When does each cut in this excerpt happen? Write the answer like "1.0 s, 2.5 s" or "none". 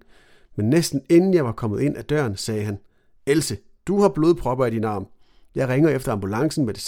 none